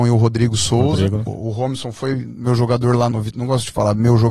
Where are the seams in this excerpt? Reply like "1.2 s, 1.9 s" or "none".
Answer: 1.3 s, 3.1 s